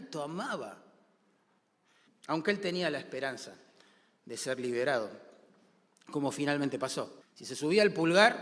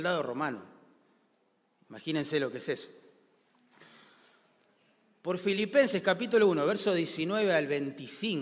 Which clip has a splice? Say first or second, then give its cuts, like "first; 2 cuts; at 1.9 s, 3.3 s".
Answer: first; 2 cuts; at 2.1 s, 7.2 s